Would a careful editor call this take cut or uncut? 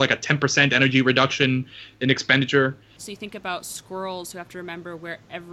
cut